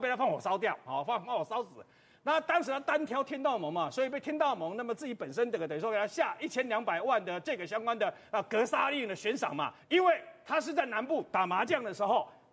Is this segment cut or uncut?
cut